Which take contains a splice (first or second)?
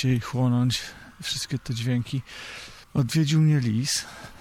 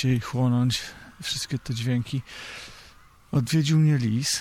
first